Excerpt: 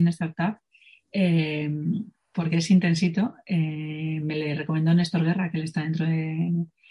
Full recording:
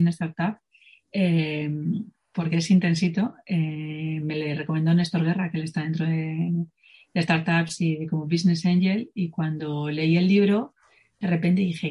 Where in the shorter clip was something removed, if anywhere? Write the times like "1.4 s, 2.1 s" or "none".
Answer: none

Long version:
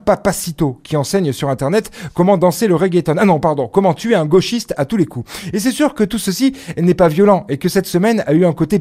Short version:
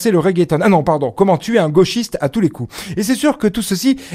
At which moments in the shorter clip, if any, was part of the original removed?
none

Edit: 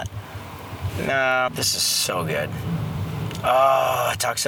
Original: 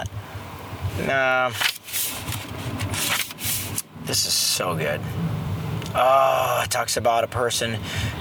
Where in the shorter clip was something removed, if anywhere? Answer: 1.5 s

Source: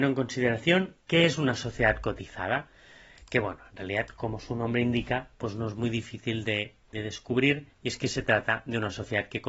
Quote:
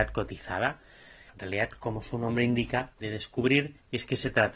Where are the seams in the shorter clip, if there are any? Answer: 1.3 s, 2.9 s

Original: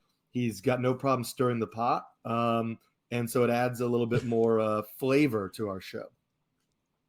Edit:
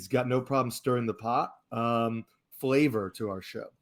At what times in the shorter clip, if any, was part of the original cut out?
2.5 s

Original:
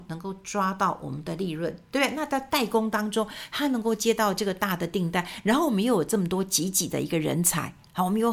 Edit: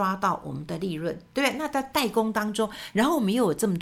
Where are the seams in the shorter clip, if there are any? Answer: 2.9 s

